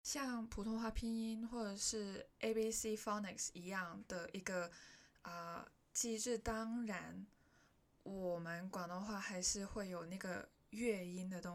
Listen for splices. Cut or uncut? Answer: uncut